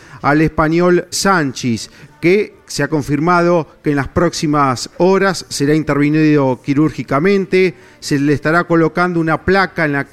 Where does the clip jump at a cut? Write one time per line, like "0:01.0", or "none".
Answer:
0:01.1